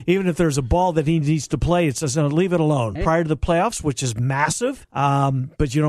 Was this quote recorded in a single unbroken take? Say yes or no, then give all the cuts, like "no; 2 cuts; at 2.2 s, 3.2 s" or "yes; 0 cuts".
no; 2 cuts; at 3.0 s, 4.8 s